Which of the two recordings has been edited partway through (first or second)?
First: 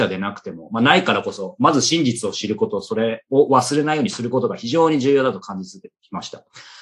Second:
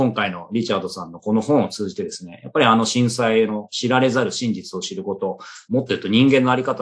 second